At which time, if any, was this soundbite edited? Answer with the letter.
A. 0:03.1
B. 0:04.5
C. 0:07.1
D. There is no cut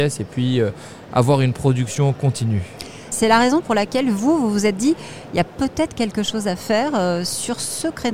A